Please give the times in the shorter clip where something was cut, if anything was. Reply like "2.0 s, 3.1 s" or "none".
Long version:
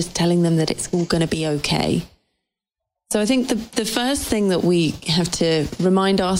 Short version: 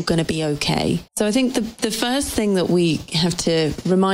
1.1 s